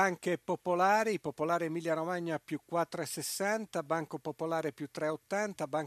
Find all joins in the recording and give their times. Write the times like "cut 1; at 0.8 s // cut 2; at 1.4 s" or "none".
none

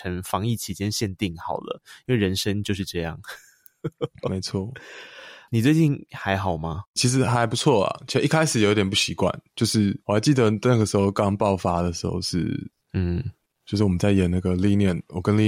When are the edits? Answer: cut 1; at 10.0 s

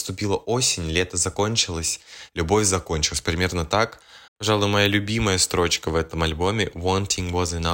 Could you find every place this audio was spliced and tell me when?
cut 1; at 2.3 s // cut 2; at 4.3 s

